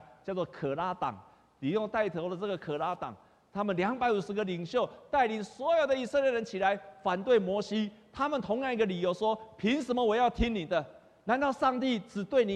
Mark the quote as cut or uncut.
uncut